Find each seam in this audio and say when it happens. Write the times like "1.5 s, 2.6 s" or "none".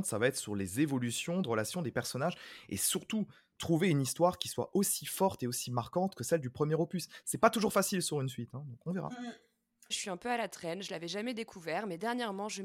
9.9 s